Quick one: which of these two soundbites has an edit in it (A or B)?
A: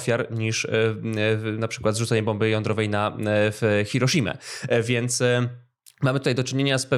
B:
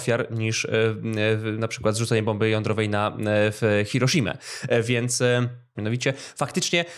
B